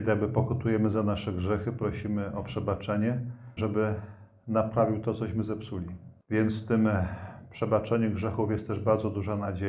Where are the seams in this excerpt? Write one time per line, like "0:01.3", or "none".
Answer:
0:03.6